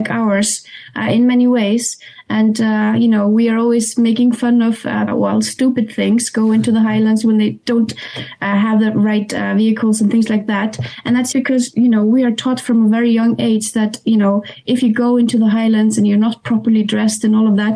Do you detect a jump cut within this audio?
yes; 2 cuts; at 5.1 s, 11.3 s

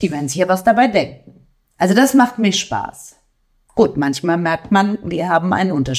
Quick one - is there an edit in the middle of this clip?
no; 0 cuts

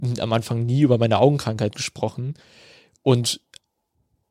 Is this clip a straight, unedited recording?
yes; 0 cuts

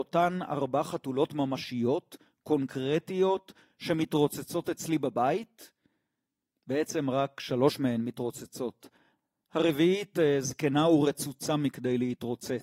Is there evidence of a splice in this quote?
no; 0 cuts

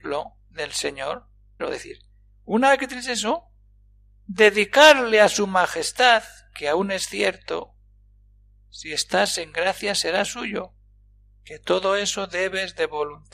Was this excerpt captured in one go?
no; 1 cut; at 1.6 s

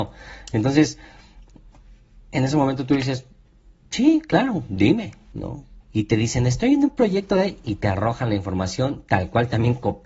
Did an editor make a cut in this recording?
yes; 1 cut; at 5.8 s

